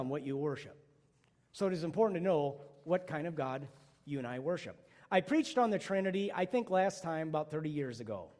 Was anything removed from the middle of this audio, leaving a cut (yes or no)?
no